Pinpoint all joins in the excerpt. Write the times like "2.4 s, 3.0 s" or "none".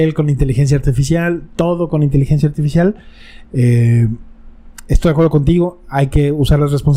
3.5 s